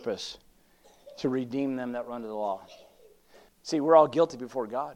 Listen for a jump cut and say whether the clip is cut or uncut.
cut